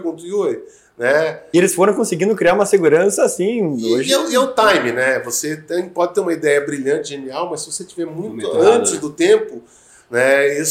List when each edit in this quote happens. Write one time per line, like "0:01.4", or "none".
0:01.5